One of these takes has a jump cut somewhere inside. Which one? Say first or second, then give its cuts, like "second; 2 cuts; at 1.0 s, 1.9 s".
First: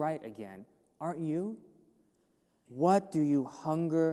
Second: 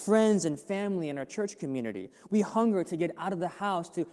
first; 1 cut; at 2.6 s